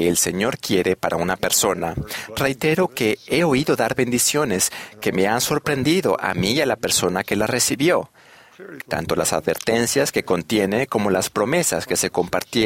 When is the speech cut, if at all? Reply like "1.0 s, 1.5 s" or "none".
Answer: 8.8 s